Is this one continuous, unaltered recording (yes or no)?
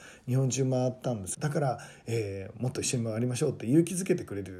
no